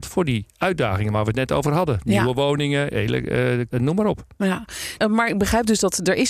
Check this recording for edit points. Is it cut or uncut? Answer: cut